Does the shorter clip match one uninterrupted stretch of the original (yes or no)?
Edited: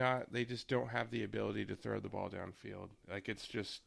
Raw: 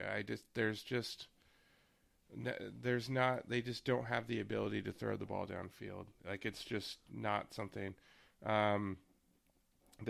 yes